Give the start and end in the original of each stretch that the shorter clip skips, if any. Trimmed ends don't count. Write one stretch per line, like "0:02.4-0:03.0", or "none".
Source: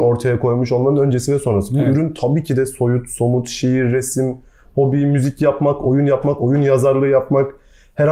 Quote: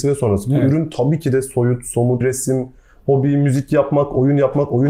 0:03.4-0:03.9